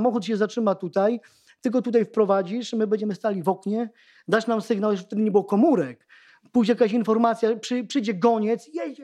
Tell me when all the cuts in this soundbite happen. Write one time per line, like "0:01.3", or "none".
none